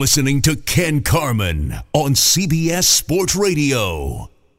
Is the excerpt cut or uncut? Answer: uncut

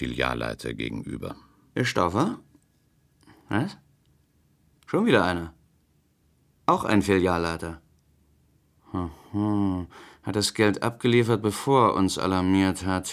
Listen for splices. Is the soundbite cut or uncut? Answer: cut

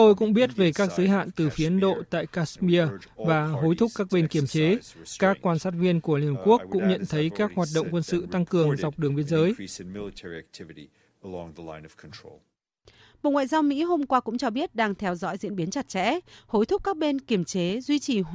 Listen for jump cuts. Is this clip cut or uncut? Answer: uncut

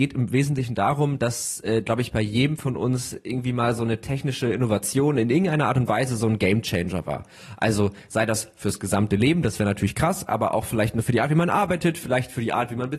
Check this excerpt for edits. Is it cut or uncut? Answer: uncut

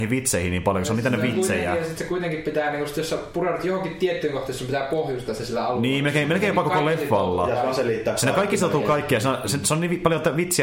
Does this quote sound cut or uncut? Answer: uncut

